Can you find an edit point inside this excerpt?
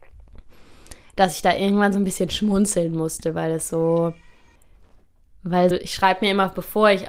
yes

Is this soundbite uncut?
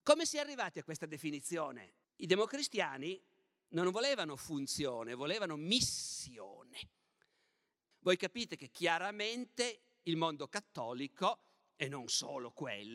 no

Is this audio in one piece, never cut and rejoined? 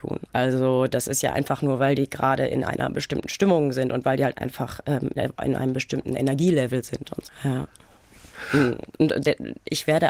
yes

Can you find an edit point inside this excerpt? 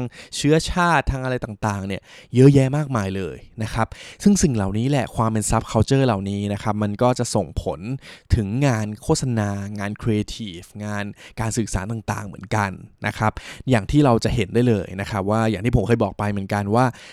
no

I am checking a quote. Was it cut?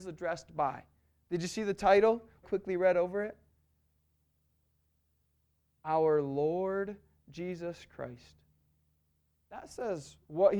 yes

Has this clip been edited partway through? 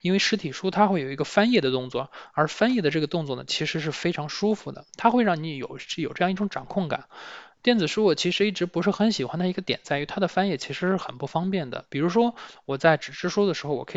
no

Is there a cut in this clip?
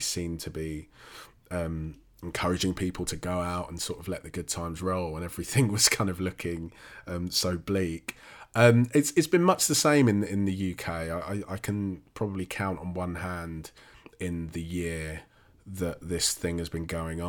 no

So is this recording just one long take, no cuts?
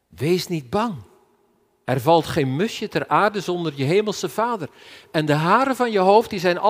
yes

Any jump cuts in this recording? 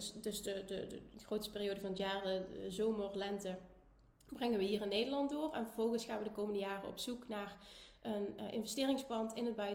no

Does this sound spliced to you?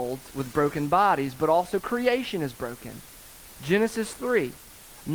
no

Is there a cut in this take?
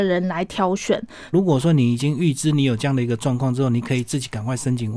yes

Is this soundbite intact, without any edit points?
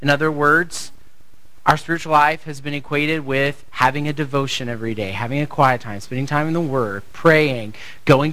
yes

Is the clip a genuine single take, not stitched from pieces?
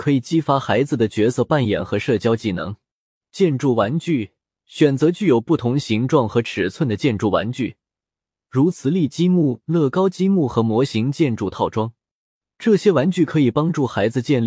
yes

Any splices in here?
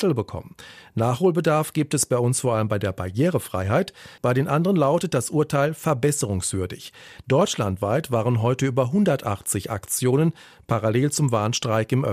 yes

